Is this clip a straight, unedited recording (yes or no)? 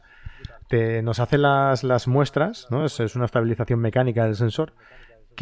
yes